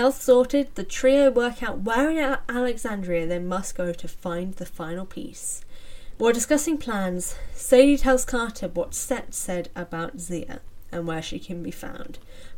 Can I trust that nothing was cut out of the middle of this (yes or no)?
no